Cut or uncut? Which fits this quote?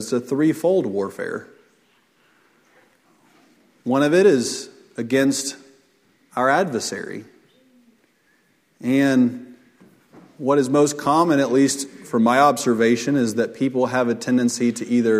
uncut